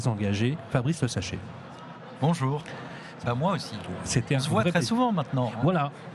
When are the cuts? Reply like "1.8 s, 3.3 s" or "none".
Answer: 3.2 s